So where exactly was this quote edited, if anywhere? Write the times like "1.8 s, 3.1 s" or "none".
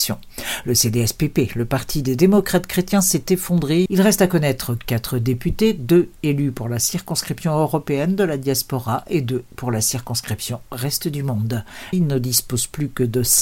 3.9 s, 11.9 s